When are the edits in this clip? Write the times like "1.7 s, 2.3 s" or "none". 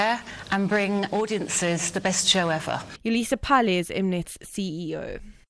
1.1 s, 2.9 s